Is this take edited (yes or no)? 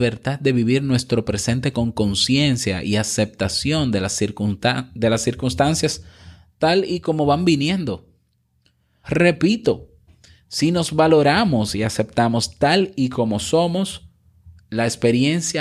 yes